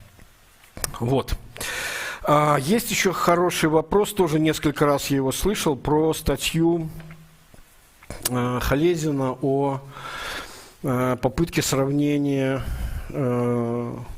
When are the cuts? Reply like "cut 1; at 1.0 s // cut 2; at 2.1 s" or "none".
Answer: none